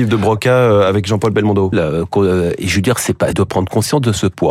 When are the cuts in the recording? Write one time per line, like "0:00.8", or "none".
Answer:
0:01.7
0:03.3

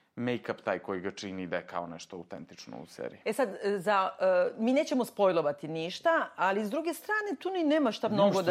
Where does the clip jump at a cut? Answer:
none

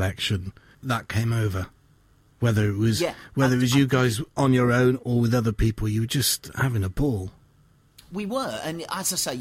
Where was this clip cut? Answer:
none

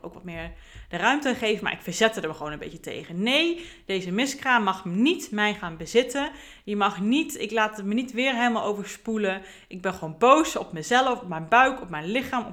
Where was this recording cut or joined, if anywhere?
none

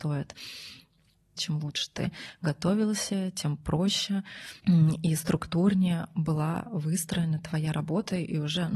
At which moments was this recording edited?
0:01.4
0:04.6

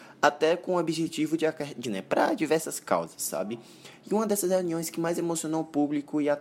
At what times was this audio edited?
0:01.8

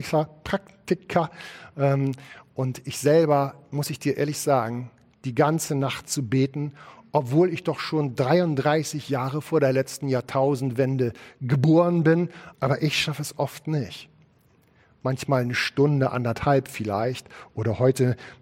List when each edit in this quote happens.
0:05.1
0:12.5

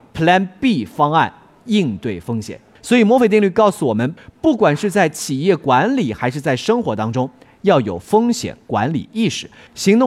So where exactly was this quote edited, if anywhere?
0:02.8
0:04.2

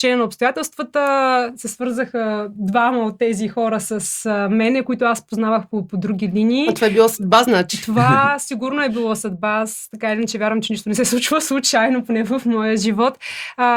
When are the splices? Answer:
none

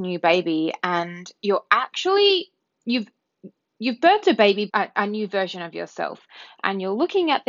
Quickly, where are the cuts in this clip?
0:04.7

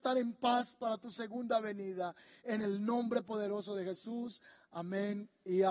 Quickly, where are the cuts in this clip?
none

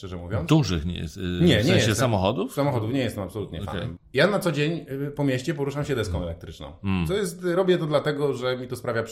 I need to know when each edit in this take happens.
0:04.0

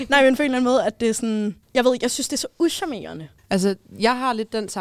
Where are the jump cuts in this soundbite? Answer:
0:01.6
0:03.4

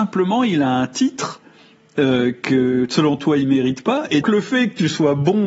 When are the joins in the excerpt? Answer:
0:04.2

